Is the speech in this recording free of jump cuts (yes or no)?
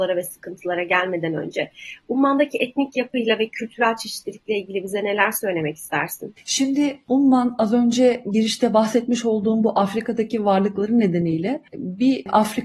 yes